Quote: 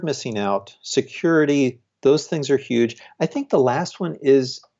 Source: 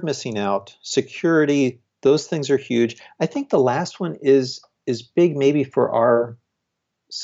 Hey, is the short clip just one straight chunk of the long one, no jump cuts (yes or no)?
yes